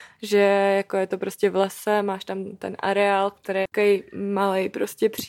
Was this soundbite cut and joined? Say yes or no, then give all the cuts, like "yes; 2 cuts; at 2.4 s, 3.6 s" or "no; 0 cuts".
no; 0 cuts